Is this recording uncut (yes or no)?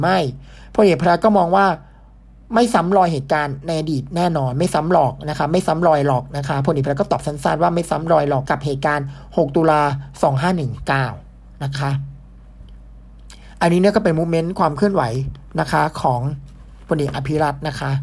no